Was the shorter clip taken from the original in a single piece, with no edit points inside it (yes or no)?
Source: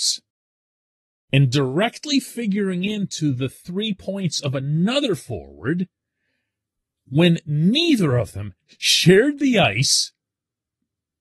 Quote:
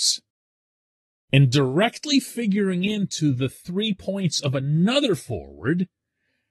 yes